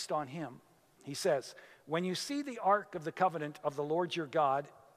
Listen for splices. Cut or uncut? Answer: cut